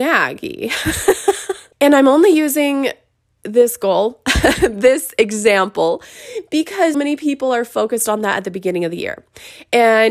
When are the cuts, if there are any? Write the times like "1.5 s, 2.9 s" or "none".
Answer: 1.7 s, 6.9 s